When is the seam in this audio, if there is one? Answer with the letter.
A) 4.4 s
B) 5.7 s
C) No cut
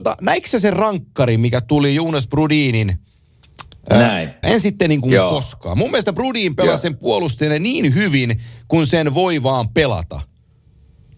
A